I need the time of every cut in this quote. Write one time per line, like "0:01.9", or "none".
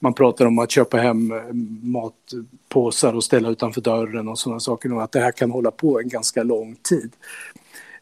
none

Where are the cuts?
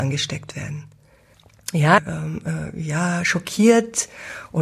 0:02.0

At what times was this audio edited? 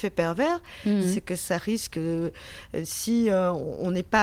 none

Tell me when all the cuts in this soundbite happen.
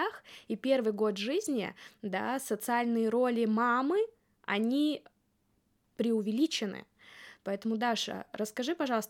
0:07.4

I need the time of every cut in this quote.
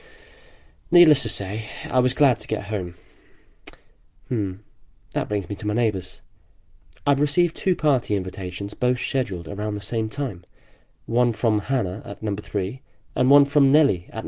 none

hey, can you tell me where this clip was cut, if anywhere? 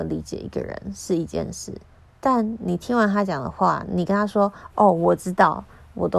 none

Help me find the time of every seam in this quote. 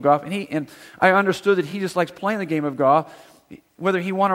none

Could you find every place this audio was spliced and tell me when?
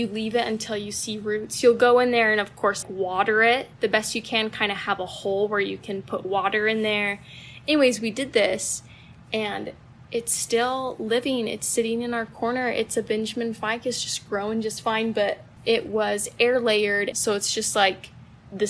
0:02.8
0:17.1

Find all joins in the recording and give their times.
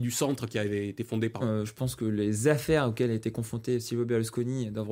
0:01.4

